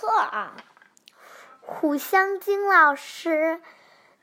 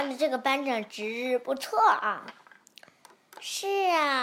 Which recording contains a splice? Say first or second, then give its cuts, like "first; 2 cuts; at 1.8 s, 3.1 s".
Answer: first; 1 cut; at 1.1 s